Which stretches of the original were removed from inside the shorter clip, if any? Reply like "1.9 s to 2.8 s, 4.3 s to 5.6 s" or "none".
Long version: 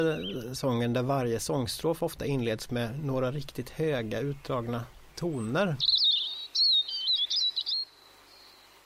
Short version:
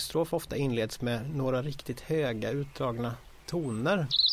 none